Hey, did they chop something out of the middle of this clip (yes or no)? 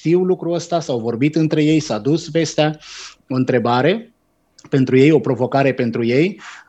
yes